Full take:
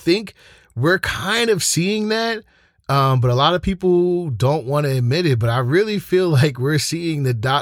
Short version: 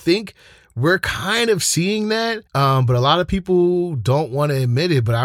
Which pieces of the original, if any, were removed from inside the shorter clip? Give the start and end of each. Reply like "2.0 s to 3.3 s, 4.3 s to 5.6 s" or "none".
2.5 s to 2.8 s